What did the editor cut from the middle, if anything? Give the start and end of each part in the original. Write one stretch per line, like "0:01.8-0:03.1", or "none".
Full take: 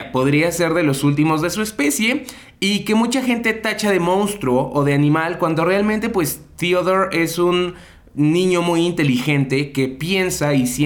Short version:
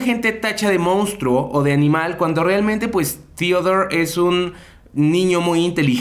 none